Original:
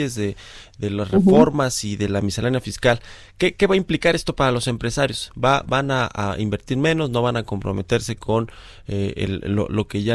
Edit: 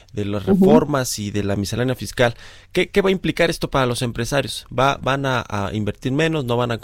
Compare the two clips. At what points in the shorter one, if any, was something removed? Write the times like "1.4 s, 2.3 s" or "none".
none

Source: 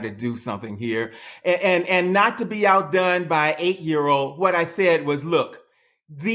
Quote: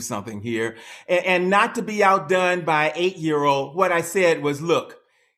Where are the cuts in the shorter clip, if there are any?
1.2 s

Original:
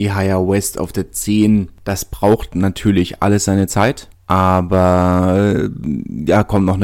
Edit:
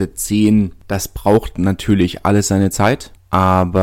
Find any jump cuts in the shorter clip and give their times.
none

